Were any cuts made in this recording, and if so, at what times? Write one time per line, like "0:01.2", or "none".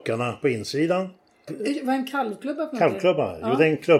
0:01.5

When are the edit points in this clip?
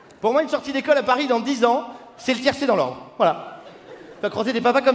none

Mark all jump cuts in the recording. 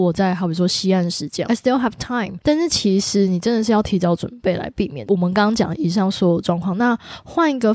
0:01.4

